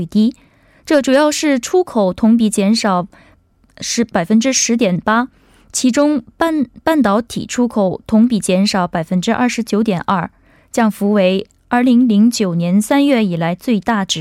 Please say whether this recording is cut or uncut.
uncut